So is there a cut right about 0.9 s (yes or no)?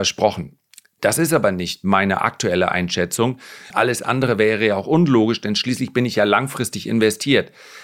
no